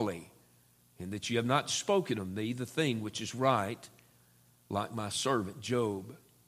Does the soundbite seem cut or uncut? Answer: uncut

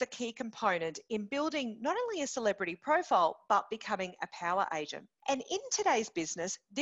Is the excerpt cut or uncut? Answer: uncut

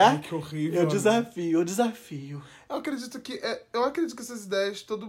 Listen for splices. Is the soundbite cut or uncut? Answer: uncut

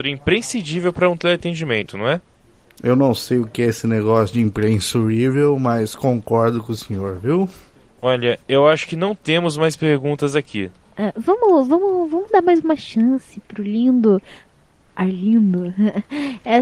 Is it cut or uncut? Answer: uncut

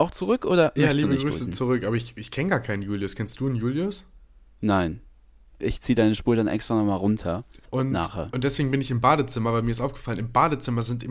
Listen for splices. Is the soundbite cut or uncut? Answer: cut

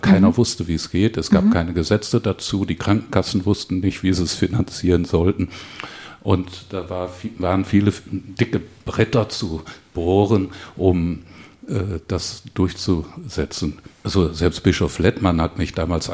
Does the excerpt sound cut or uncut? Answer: uncut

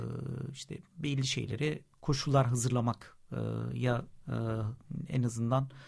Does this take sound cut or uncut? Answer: uncut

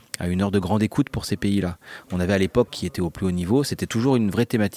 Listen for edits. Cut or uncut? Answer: cut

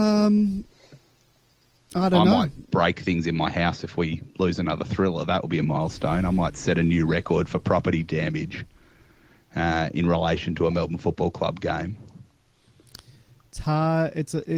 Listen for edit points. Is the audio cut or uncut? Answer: uncut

